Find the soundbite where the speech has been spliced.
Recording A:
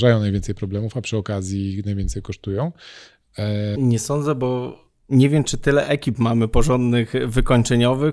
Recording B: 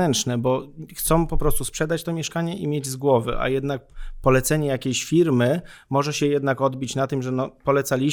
A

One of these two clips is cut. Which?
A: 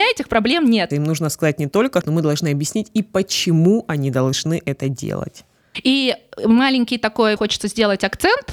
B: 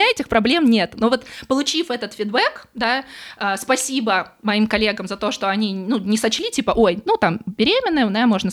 A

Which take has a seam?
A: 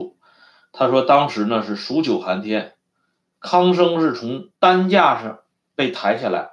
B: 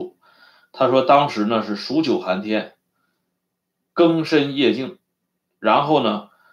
A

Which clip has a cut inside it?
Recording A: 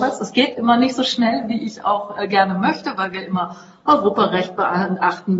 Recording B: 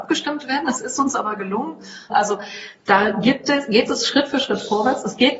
B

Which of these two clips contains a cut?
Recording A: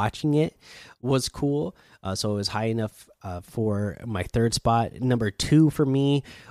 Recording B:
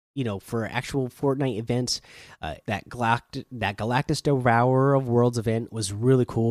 B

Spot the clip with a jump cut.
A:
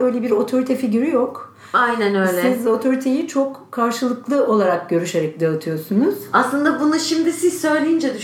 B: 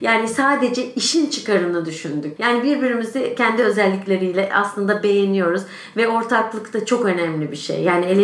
B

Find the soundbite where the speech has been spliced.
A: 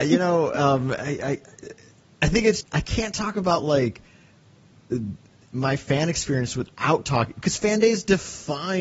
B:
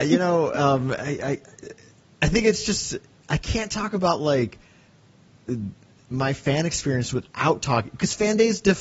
A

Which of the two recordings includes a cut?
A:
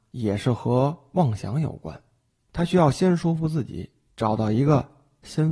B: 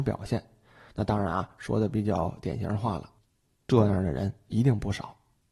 B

